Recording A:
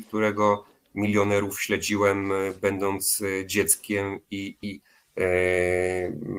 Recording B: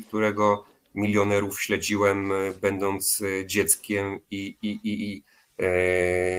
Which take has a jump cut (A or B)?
A